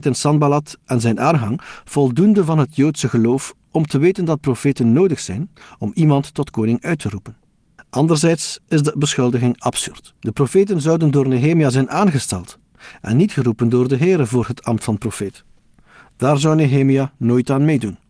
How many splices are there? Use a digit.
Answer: 1